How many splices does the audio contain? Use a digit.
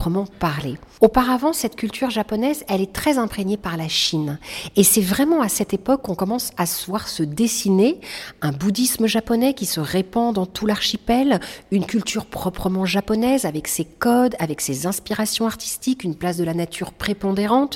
0